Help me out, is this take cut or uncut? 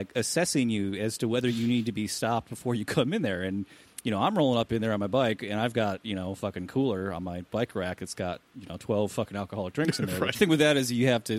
cut